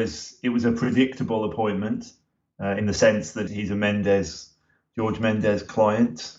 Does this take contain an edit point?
yes; 1 cut; at 3.5 s

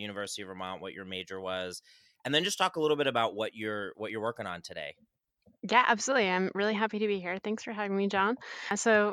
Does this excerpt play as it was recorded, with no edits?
yes; 0 cuts

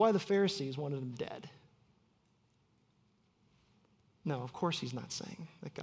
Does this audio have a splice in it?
no; 0 cuts

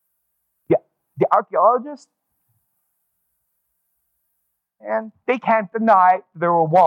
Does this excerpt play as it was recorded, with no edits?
yes; 0 cuts

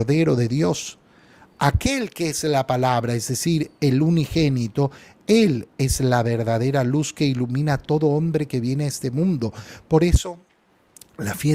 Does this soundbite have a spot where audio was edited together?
no; 0 cuts

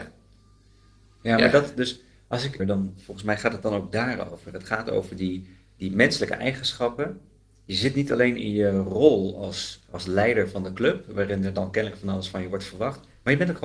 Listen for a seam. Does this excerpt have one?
yes; 1 cut; at 2.6 s

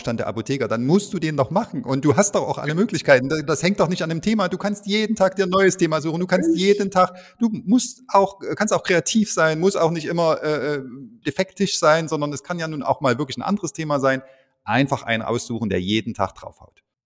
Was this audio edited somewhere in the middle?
yes; 1 cut; at 11.2 s

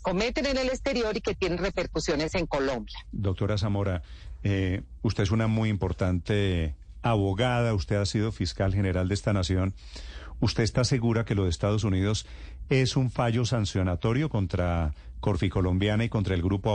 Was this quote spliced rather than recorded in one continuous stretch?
no; 0 cuts

